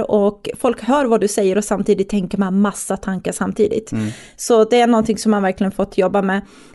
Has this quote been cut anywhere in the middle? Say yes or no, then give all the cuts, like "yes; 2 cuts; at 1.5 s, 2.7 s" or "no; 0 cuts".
no; 0 cuts